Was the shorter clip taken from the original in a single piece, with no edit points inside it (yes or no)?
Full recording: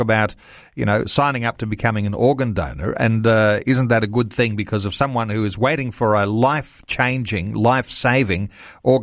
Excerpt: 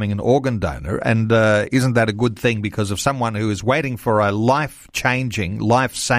yes